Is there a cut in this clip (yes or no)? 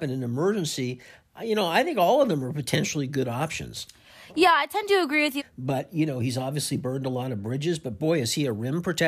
yes